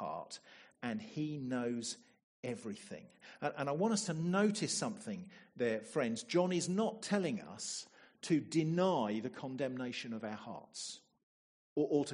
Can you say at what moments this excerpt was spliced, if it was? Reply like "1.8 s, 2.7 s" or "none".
none